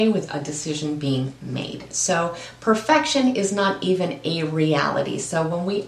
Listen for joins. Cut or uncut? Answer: uncut